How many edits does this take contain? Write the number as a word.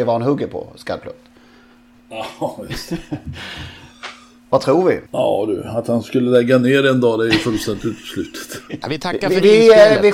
two